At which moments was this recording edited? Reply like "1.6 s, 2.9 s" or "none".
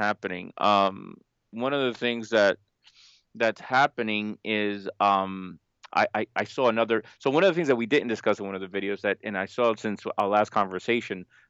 1.5 s